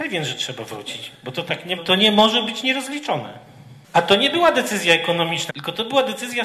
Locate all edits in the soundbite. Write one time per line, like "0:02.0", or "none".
0:01.8
0:03.8
0:05.5

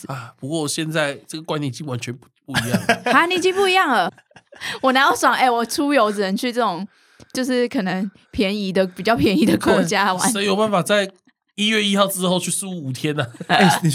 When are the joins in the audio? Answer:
0:04.1

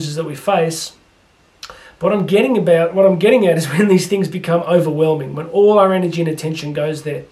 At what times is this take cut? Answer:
none

